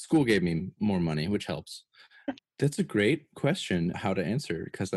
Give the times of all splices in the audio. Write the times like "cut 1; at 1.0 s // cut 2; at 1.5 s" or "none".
cut 1; at 2.4 s // cut 2; at 3.9 s